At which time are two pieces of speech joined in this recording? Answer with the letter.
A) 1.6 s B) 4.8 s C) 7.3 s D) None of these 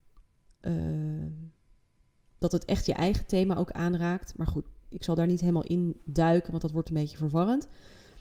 B